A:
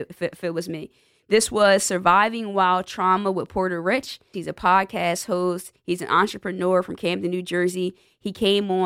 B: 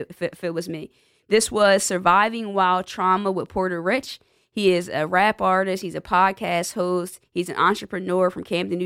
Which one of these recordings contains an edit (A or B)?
A